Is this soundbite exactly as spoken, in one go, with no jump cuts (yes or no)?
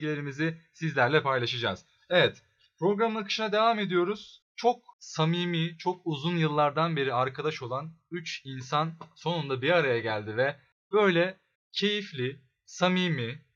yes